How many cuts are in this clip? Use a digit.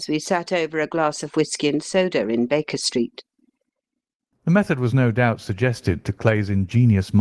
1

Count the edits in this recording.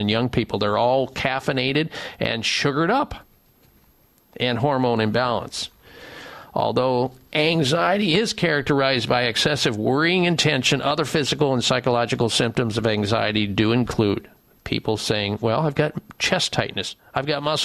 0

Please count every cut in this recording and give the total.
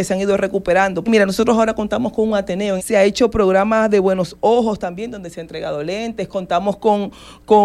2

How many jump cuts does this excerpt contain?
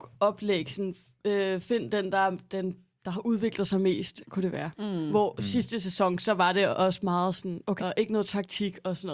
2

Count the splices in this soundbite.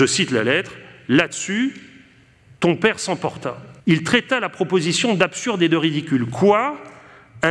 1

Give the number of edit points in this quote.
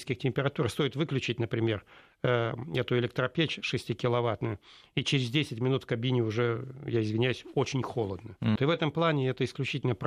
1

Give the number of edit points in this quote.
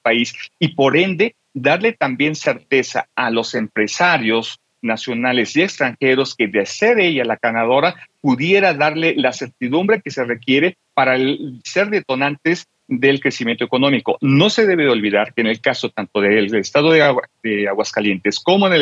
0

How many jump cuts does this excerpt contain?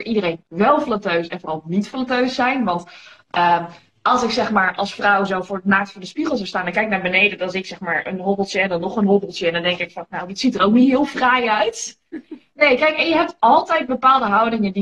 1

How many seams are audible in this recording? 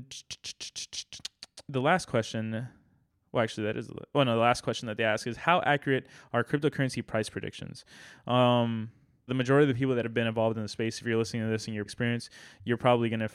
2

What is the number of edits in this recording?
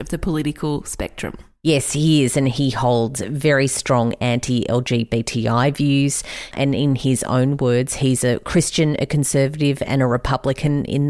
1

